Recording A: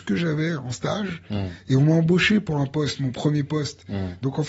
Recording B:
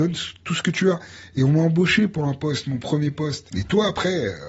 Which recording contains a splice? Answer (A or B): B